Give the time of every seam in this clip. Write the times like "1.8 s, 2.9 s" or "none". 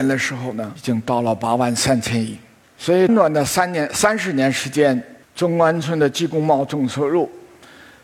3.1 s, 5.2 s